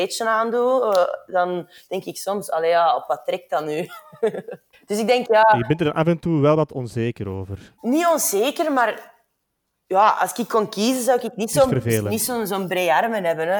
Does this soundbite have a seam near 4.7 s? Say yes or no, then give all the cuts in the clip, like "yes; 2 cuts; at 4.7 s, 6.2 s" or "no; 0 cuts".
yes; 2 cuts; at 4.7 s, 7.8 s